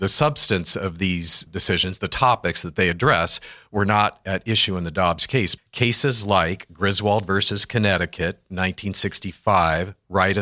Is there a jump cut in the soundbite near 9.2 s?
no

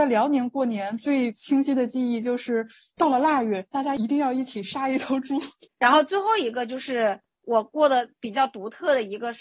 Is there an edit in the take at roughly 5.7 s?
yes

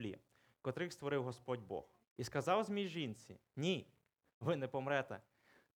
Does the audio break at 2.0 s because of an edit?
yes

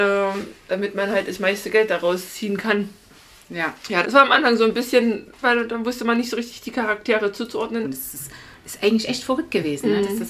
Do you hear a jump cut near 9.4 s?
no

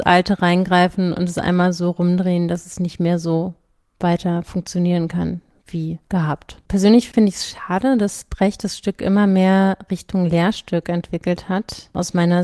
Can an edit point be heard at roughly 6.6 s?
no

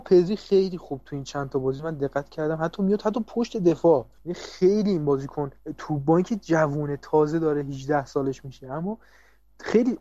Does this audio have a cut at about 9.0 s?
no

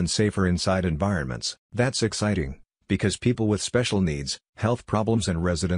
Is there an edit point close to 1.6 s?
yes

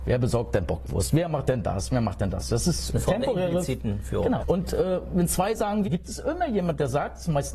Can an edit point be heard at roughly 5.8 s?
yes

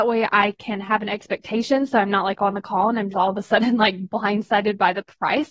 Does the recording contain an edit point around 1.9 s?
no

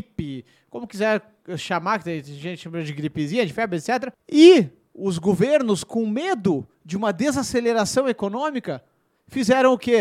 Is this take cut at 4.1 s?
yes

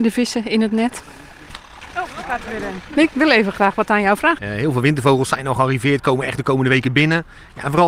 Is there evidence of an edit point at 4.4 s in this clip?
yes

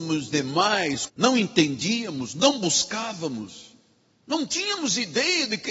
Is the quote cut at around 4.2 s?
no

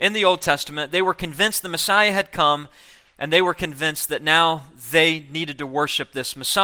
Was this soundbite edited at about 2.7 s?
no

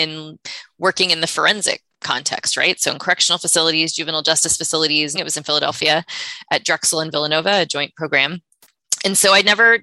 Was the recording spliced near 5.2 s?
yes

